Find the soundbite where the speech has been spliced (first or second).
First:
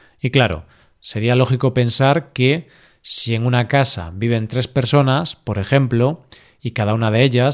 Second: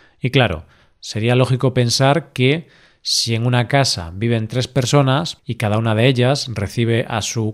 second